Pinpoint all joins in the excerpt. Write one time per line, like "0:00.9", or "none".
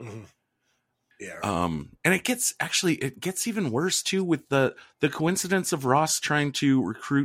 0:01.1